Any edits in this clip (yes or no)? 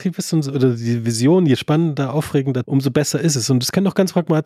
yes